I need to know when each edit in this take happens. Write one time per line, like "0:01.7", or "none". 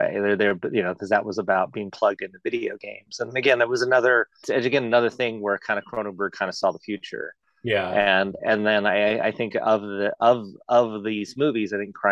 0:04.4